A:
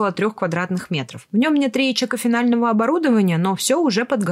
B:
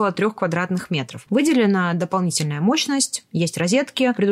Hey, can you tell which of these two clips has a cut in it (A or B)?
B